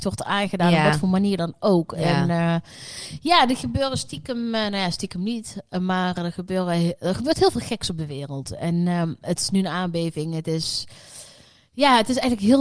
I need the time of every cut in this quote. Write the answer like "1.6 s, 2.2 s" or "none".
none

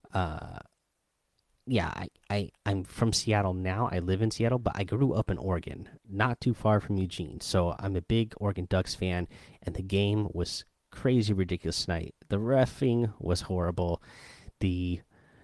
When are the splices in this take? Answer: none

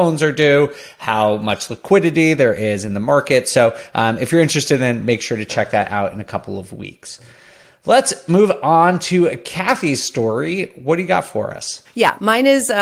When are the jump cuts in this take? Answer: none

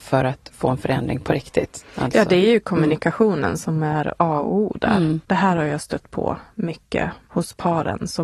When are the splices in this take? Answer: 5.2 s

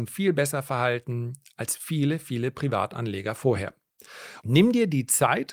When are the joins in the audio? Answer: 4.4 s

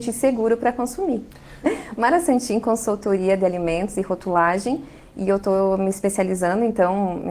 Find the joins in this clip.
1.6 s

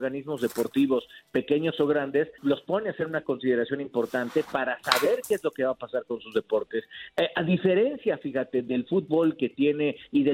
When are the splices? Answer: 2.4 s

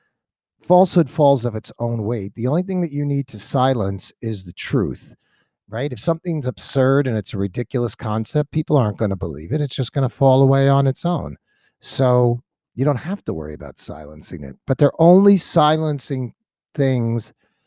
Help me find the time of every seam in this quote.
none

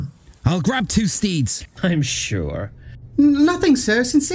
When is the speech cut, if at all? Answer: 1.8 s, 3.1 s

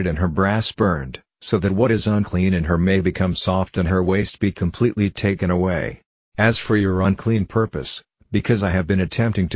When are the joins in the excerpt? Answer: 6.3 s

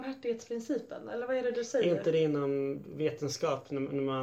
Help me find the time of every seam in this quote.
none

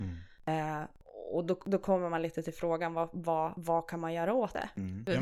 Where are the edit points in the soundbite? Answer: none

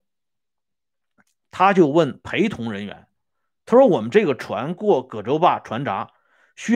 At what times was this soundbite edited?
none

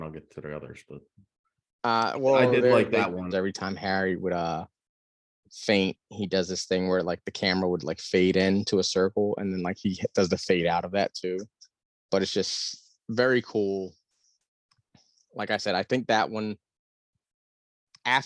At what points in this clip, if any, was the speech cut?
3.3 s

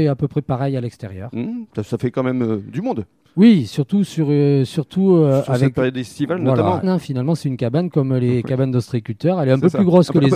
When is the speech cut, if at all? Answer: 6.8 s

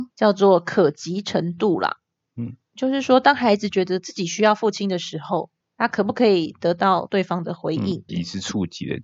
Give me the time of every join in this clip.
8.1 s

